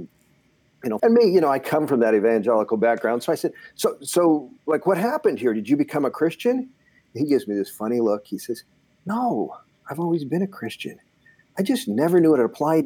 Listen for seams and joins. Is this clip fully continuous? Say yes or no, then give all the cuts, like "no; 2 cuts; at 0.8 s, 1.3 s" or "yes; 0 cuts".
no; 1 cut; at 1.0 s